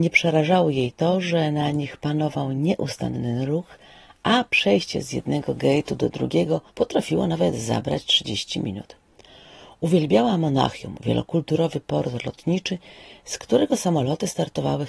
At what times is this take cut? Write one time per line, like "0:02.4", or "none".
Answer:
0:06.7